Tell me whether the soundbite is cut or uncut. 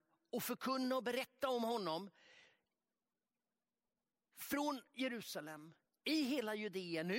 uncut